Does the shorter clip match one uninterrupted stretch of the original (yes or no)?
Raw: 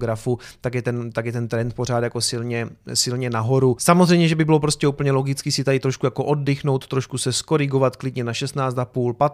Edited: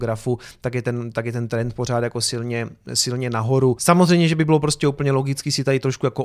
yes